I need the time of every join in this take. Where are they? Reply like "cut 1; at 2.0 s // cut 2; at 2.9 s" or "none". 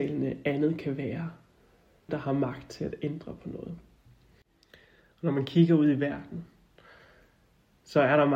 cut 1; at 2.1 s